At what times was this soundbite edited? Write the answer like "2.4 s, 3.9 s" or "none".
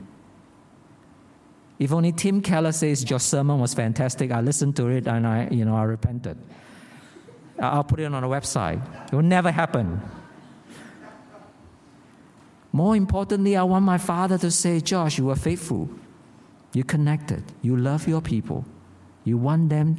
3.1 s